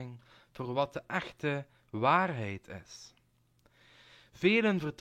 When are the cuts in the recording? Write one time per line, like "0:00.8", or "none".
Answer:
none